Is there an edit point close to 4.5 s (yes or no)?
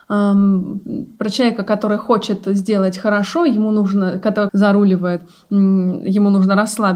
yes